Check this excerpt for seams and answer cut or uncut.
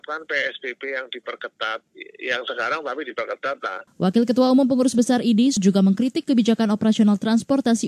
cut